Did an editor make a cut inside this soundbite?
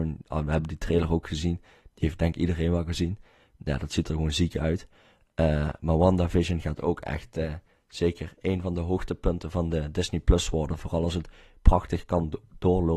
no; 0 cuts

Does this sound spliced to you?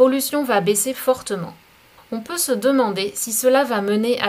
yes; 1 cut; at 2.0 s

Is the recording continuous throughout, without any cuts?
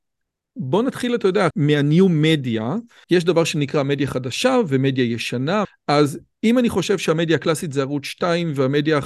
no; 3 cuts; at 1.5 s, 3.0 s, 5.6 s

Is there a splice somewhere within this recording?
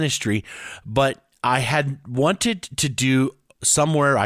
no; 0 cuts

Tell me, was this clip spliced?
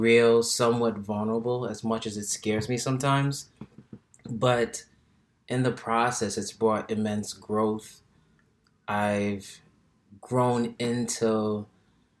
no; 0 cuts

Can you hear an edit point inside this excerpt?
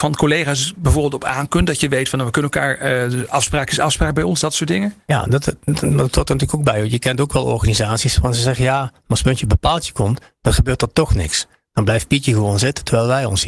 no; 0 cuts

